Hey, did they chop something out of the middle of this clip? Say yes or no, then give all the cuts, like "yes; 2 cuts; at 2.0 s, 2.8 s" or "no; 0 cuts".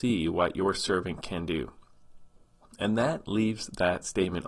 no; 0 cuts